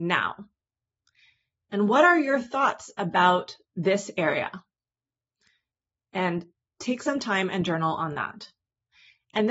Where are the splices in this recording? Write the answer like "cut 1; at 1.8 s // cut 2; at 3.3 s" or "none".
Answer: none